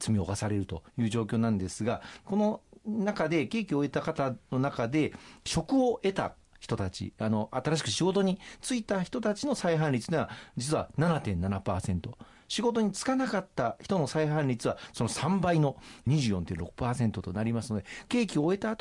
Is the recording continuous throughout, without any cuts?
yes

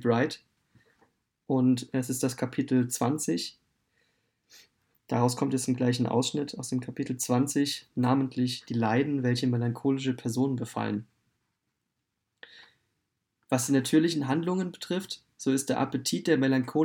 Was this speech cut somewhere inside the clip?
no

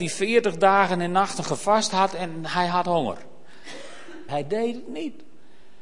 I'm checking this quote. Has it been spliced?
yes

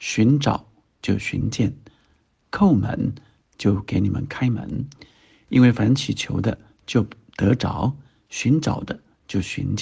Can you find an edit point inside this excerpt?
no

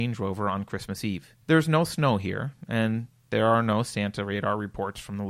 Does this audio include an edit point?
yes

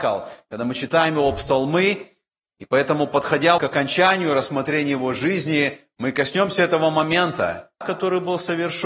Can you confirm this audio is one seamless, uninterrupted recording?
no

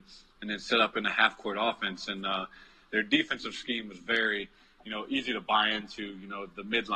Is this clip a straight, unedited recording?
yes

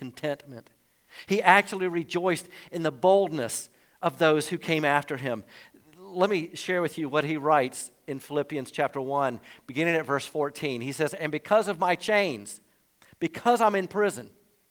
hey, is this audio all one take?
yes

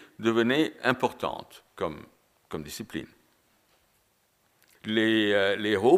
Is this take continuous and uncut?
no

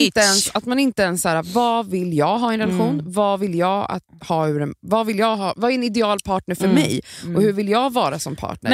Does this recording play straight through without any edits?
yes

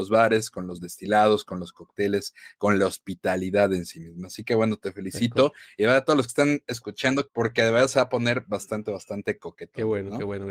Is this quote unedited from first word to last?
no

